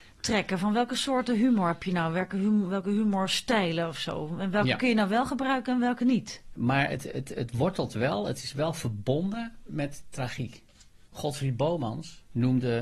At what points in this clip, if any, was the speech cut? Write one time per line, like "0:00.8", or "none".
0:06.6
0:11.1

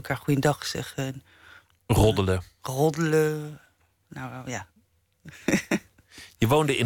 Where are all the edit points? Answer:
none

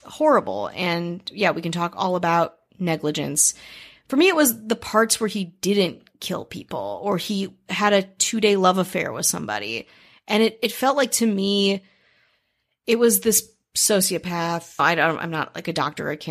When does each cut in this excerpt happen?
none

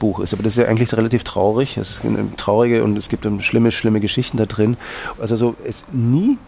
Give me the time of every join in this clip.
0:05.2

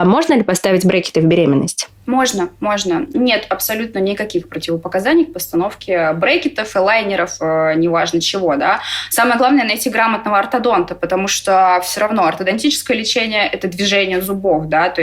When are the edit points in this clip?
none

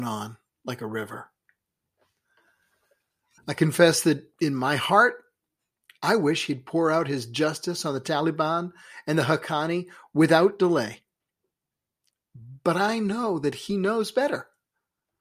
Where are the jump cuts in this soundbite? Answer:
0:03.4

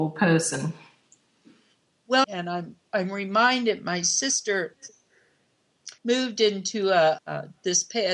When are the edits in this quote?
0:02.2
0:06.0
0:07.2

